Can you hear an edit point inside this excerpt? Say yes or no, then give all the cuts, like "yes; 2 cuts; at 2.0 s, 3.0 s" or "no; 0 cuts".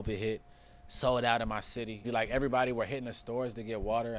yes; 1 cut; at 2.0 s